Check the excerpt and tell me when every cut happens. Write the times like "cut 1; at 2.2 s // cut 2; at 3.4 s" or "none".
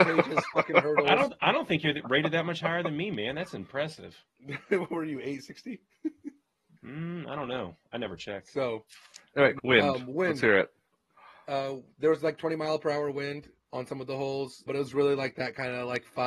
cut 1; at 9.6 s // cut 2; at 14.7 s